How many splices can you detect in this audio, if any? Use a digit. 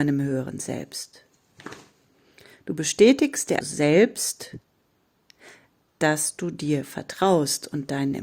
1